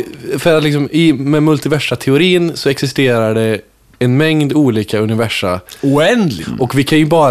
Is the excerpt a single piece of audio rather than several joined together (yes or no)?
no